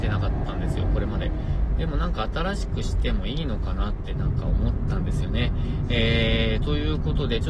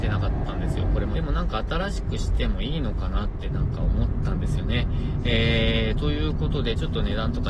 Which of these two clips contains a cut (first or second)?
second